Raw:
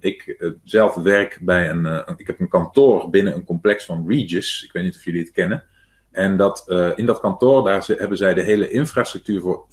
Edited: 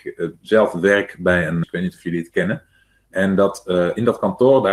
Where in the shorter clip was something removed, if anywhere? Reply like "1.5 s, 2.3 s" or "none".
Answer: 1.6 s